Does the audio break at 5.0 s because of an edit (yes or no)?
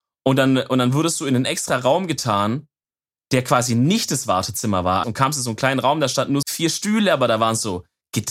yes